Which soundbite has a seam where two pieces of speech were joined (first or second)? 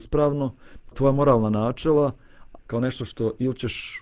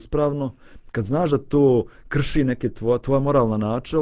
first